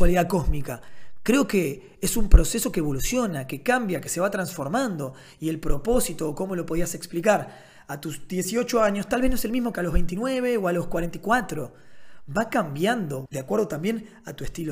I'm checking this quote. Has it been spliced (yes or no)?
yes